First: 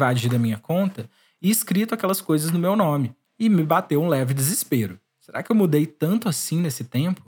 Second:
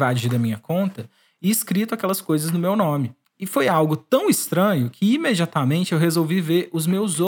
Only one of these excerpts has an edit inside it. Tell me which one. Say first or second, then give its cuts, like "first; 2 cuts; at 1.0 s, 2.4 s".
first; 1 cut; at 3.3 s